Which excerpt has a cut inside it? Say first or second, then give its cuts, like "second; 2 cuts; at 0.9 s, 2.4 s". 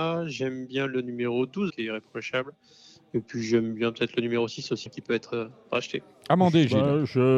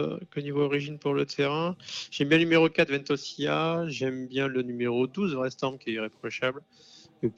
first; 2 cuts; at 1.7 s, 4.9 s